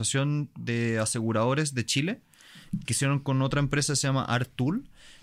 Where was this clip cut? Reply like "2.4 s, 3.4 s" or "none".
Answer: 2.9 s